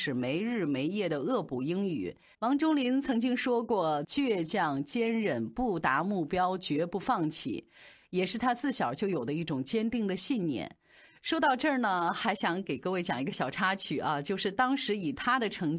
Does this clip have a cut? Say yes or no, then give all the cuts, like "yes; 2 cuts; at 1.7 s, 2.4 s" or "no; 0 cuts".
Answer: yes; 2 cuts; at 2.3 s, 4.0 s